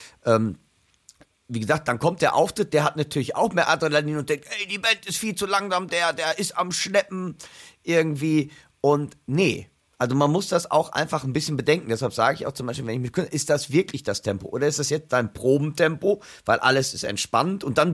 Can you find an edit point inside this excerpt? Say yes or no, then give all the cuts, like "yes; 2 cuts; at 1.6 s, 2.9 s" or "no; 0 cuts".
yes; 1 cut; at 5.9 s